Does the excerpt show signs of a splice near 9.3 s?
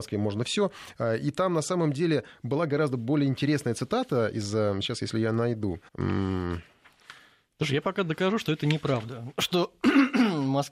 no; 1 cut; at 5.9 s

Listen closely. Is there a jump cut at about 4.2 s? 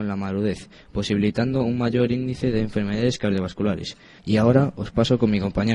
yes; 1 cut; at 4.2 s

